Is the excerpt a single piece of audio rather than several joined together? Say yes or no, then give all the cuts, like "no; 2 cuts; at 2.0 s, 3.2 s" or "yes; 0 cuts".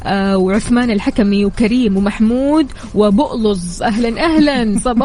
yes; 0 cuts